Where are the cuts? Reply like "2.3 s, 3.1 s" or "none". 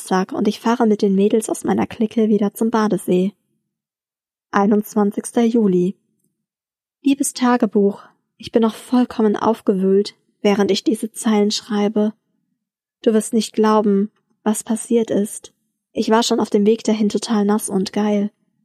15.9 s

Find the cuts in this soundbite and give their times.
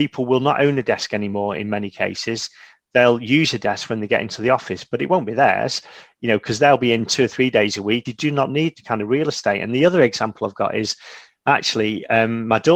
8.1 s

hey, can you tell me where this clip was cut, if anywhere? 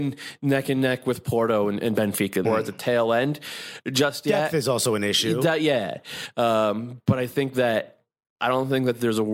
2.4 s

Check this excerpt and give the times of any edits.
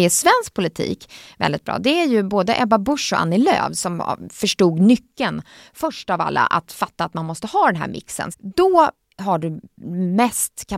8.3 s

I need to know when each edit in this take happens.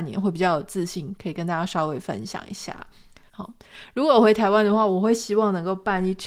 3.3 s

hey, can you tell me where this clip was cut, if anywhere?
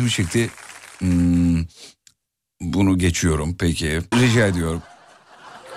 4.1 s

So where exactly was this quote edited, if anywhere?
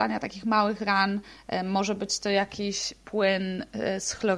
none

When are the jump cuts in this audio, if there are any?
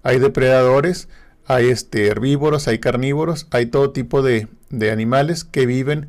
none

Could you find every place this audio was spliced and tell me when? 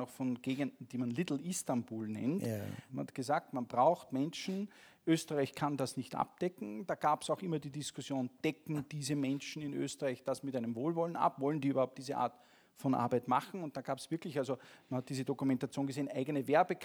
2.9 s

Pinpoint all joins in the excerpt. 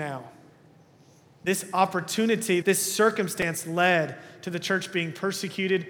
2.6 s

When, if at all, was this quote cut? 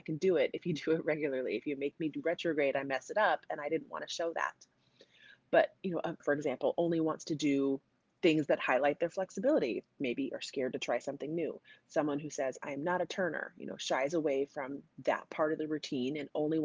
6.2 s

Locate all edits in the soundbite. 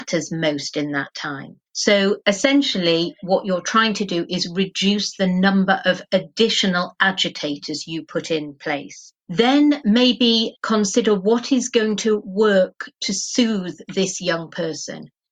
1.7 s

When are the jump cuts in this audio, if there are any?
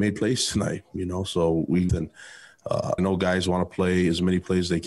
1.9 s, 3.0 s

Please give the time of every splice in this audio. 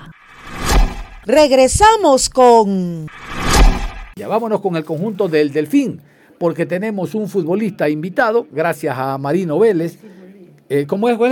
4.1 s

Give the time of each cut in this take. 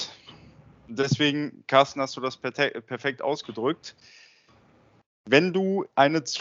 none

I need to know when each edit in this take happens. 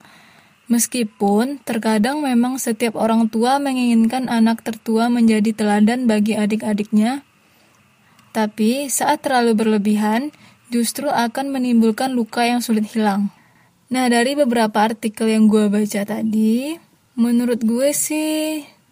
none

